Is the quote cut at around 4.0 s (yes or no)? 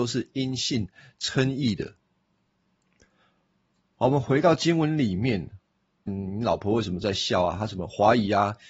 no